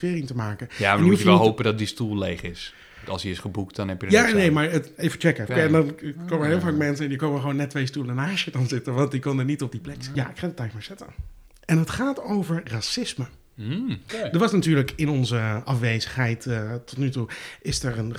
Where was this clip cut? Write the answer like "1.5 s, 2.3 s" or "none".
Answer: 5.5 s, 10.1 s, 14.1 s